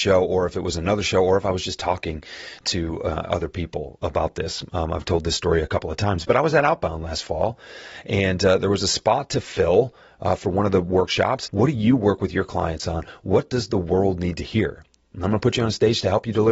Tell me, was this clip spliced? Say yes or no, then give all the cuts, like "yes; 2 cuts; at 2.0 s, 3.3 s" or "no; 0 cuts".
yes; 1 cut; at 11.5 s